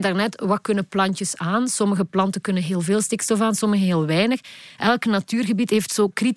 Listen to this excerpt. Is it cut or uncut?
uncut